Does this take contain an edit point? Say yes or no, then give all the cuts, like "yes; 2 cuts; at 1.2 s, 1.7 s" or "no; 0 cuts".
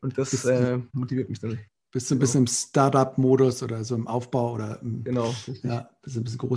no; 0 cuts